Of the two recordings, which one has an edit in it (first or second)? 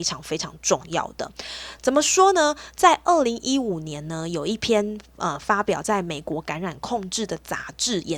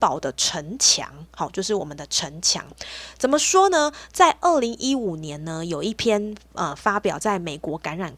first